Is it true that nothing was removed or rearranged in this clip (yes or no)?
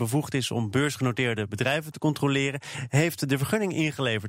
yes